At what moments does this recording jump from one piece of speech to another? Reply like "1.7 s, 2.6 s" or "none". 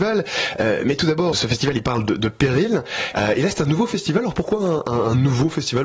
1.3 s, 3.1 s